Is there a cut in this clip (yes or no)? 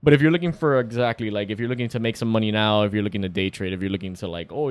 no